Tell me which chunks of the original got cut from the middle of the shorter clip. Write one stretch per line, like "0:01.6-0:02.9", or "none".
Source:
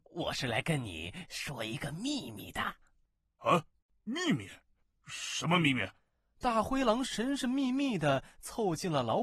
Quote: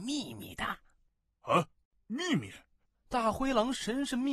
0:04.9-0:06.3